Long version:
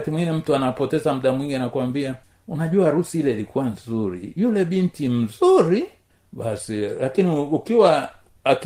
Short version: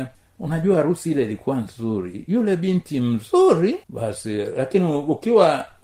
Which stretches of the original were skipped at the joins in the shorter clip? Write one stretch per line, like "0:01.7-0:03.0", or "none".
0:05.9-0:06.3